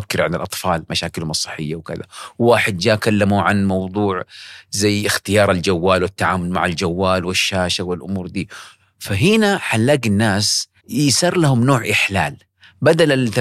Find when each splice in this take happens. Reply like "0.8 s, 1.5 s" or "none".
10.8 s

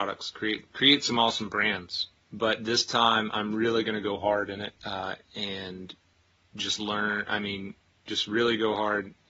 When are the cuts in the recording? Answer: 2.2 s, 4.8 s

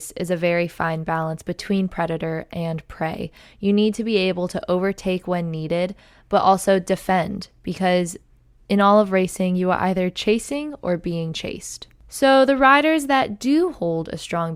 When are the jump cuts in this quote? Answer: none

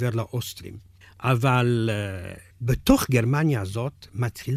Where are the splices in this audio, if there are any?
1.0 s, 2.5 s

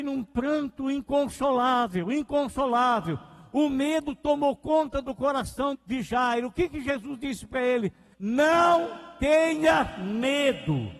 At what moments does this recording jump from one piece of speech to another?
5.7 s, 8.1 s

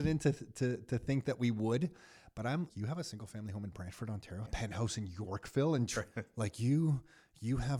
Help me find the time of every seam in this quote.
2.7 s, 4.5 s, 6.1 s

